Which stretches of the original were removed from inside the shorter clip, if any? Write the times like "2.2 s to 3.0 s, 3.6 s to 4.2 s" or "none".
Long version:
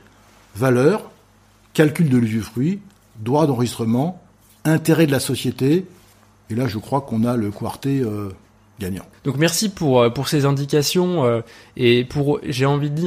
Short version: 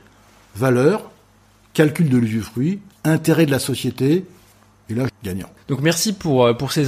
2.9 s to 4.5 s, 6.7 s to 8.7 s